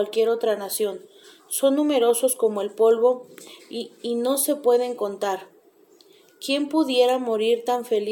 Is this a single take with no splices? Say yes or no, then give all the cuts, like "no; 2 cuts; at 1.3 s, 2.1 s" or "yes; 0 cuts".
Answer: yes; 0 cuts